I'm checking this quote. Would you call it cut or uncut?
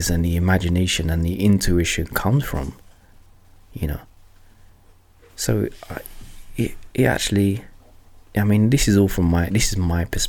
uncut